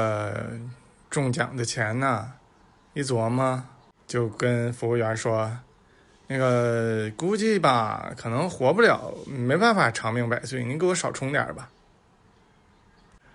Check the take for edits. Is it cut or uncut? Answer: uncut